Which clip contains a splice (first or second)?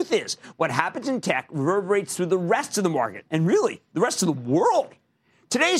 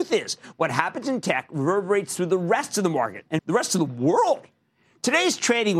second